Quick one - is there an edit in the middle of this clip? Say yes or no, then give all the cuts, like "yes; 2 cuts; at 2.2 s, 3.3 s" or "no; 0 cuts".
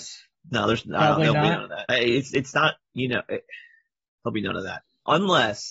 yes; 2 cuts; at 1.9 s, 4.2 s